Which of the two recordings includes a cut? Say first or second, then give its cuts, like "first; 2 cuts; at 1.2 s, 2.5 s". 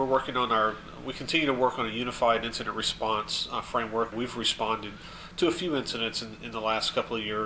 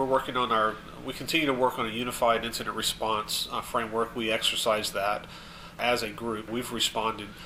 first; 1 cut; at 4.1 s